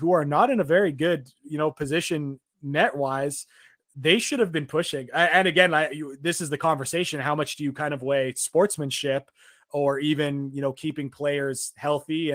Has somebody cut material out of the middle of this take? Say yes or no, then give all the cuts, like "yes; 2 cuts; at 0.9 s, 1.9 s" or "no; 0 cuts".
no; 0 cuts